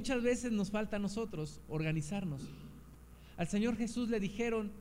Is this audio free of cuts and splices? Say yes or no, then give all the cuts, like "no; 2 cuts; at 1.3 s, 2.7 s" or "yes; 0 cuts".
yes; 0 cuts